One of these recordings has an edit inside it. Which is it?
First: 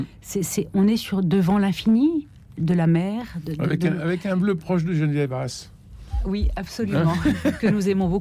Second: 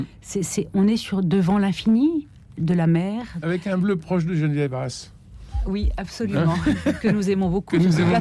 second; 1 cut; at 3.4 s

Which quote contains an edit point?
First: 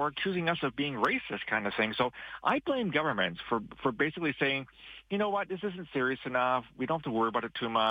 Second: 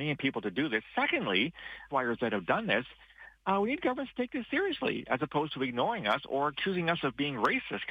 second; 1 cut; at 1.9 s

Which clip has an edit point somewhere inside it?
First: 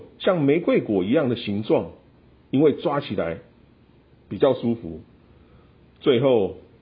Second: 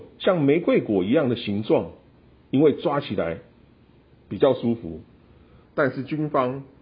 second; 1 cut; at 5.6 s

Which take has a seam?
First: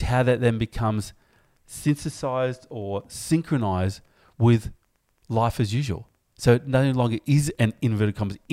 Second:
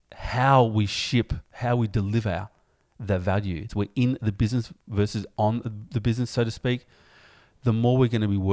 second; 1 cut; at 3.7 s

